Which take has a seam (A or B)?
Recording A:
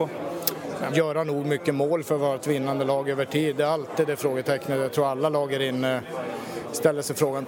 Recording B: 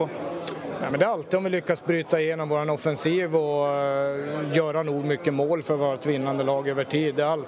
A